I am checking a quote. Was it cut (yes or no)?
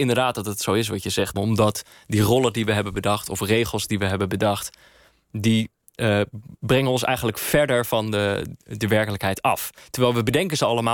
yes